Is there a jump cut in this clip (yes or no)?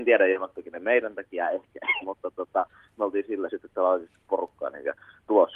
yes